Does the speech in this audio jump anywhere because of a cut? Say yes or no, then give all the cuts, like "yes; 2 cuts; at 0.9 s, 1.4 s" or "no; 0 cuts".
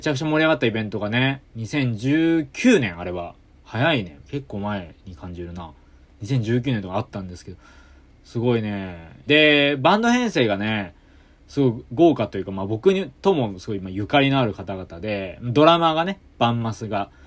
yes; 1 cut; at 9.3 s